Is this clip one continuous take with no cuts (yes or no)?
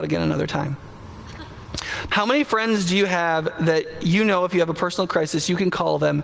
no